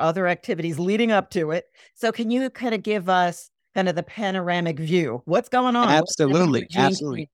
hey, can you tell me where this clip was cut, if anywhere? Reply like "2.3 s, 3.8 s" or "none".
none